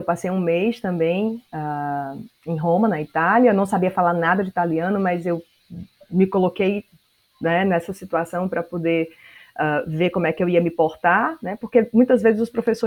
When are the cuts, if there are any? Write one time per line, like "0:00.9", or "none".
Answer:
none